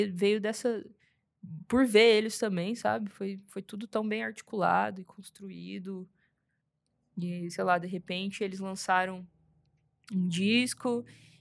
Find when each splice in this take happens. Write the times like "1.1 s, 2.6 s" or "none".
none